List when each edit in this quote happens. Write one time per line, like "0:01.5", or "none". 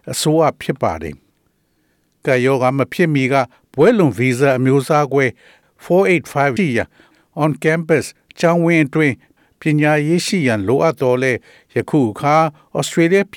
0:06.6